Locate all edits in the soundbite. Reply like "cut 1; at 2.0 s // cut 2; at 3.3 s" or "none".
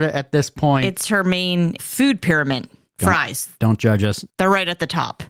cut 1; at 1.8 s